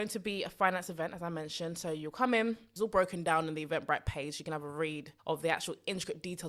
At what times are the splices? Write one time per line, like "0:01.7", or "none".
0:02.8
0:05.2